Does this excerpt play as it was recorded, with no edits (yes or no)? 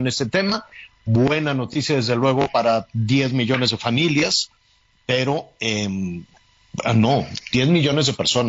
yes